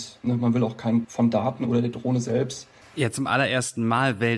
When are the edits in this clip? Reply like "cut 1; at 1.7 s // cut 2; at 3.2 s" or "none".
cut 1; at 1.0 s // cut 2; at 2.8 s